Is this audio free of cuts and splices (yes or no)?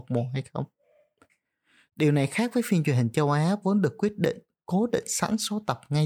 yes